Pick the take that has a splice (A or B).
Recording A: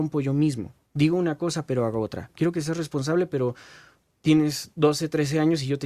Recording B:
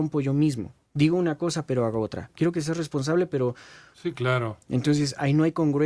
B